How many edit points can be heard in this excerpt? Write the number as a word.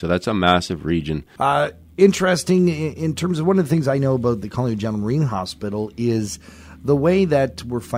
one